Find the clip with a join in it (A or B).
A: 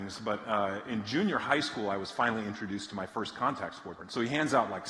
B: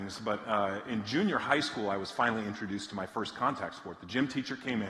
A